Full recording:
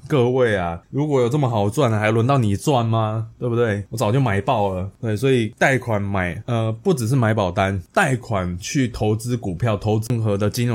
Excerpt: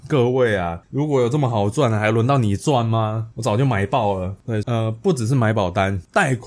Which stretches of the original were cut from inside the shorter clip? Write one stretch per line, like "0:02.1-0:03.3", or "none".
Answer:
0:03.3-0:03.9
0:05.2-0:06.4

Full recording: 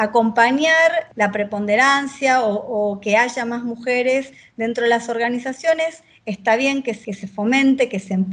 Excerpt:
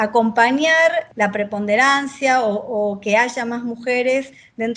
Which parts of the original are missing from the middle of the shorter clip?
none

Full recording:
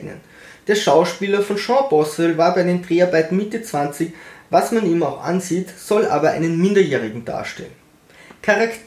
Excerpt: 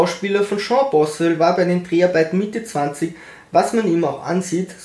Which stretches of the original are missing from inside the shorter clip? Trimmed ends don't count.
none

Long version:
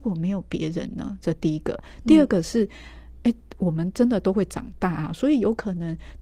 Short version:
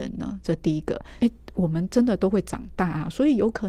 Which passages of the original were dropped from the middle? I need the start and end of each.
0:02.0-0:03.2

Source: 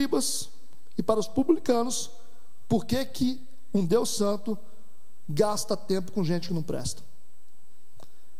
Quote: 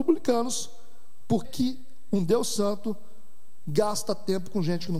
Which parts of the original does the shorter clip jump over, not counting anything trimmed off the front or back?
0:02.8-0:03.1

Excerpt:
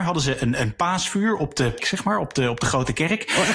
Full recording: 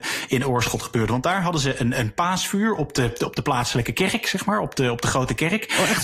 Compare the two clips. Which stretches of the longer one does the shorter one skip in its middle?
0:03.2-0:04.2

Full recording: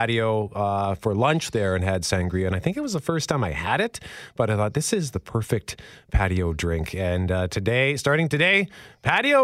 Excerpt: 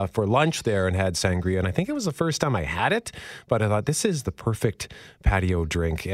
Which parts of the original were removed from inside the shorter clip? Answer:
none

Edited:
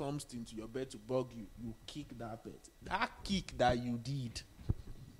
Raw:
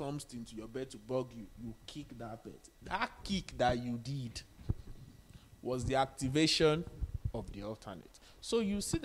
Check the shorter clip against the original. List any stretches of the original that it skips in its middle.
none

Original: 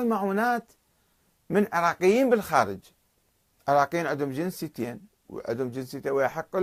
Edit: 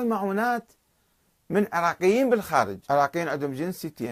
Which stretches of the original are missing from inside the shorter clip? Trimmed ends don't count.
0:02.8-0:03.6

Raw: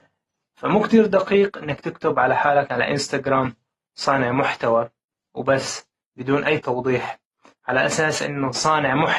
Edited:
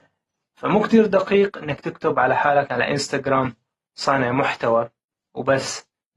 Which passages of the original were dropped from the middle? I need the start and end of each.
none

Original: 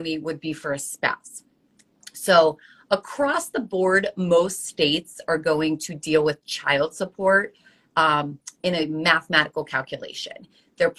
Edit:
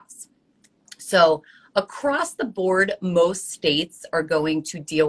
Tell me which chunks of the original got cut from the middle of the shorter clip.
none

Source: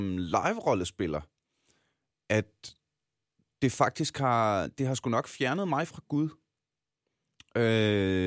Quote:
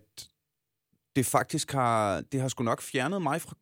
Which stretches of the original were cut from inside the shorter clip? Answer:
none

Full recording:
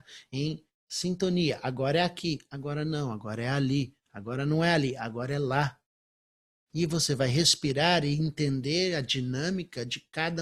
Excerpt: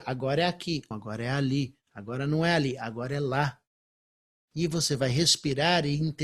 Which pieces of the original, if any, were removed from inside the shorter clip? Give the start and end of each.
0:02.5-0:03.1

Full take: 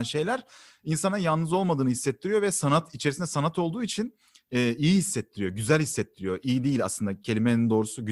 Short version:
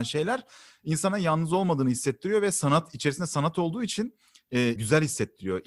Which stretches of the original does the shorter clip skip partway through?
0:04.8-0:05.5

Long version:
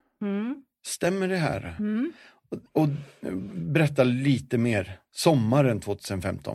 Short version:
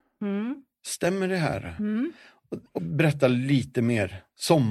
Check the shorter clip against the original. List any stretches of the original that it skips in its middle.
0:02.7-0:03.5

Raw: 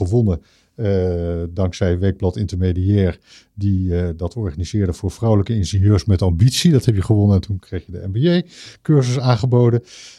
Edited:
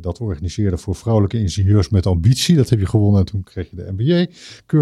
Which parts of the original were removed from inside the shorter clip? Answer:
none

